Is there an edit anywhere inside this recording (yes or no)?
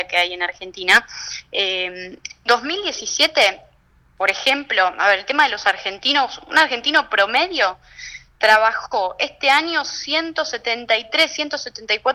no